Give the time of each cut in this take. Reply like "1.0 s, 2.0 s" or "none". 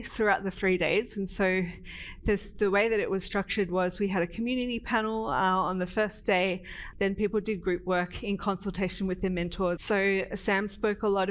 6.9 s, 9.8 s